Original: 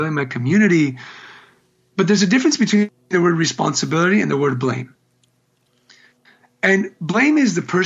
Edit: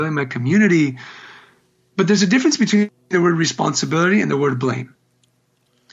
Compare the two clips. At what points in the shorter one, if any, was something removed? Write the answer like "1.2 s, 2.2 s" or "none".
none